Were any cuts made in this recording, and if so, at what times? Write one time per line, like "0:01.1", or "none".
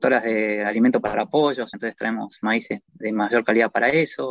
none